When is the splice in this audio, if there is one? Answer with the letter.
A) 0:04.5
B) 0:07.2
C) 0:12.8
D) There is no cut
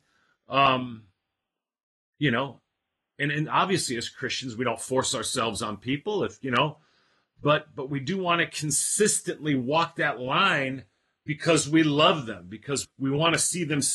C